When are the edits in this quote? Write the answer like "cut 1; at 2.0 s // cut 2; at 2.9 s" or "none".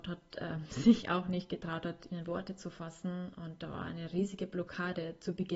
cut 1; at 1.0 s // cut 2; at 2.1 s